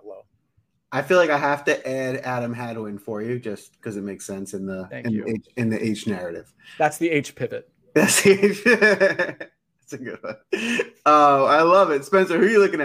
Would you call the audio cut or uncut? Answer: uncut